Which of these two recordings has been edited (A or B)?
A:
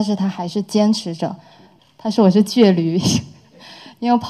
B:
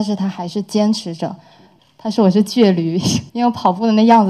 B